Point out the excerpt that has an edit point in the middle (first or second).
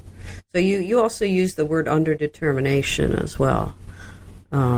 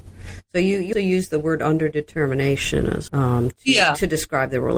second